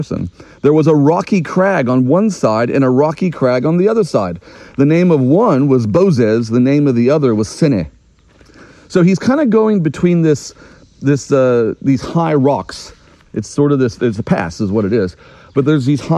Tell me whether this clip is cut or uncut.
uncut